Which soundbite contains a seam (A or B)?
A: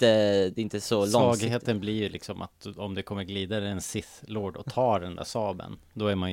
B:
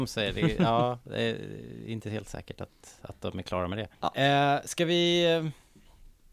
B